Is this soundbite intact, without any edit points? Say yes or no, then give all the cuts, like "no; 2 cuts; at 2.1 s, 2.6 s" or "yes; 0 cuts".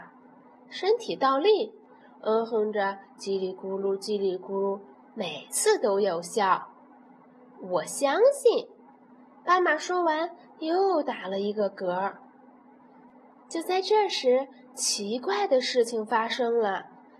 no; 1 cut; at 2.0 s